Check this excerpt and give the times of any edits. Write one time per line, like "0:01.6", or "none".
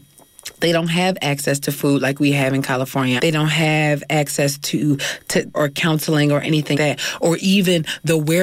0:03.2
0:05.5
0:06.7